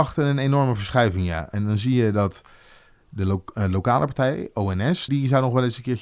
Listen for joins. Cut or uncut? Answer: cut